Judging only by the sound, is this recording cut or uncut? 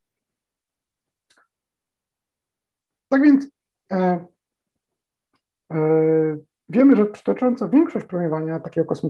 uncut